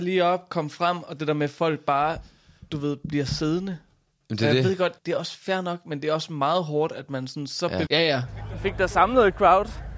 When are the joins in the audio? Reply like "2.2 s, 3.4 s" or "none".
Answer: 5.0 s, 7.9 s